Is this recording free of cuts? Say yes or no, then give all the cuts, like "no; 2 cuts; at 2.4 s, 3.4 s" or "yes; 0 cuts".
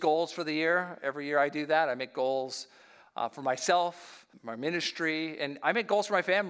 no; 1 cut; at 4.3 s